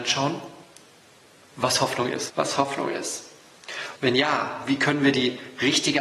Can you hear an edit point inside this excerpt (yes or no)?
yes